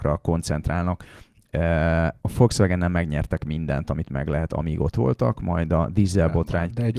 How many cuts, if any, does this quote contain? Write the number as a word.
one